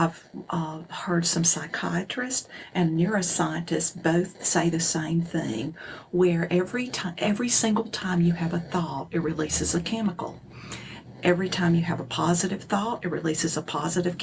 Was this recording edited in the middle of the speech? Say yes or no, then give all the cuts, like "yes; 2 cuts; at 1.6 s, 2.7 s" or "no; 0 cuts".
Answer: no; 0 cuts